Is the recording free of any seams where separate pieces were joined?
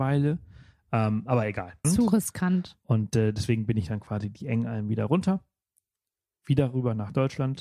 no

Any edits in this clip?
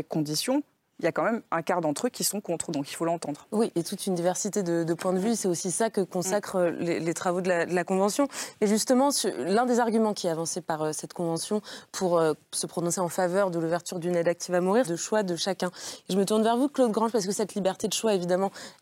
yes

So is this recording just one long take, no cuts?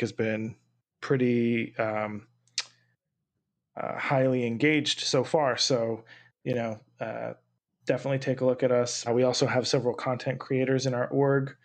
no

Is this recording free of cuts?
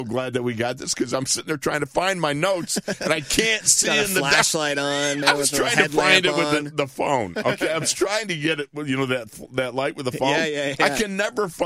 no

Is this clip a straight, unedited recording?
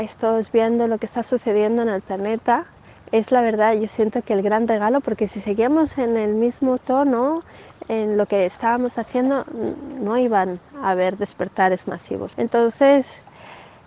no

